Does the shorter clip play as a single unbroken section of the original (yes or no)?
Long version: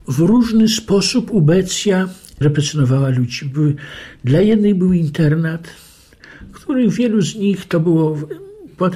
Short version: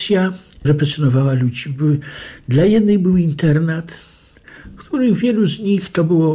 yes